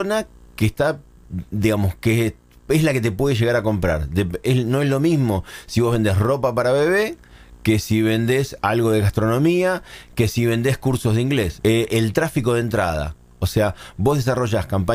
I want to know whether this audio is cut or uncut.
cut